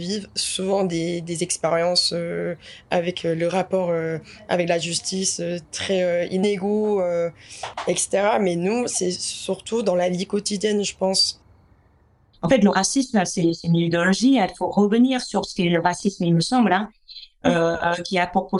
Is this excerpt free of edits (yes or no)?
yes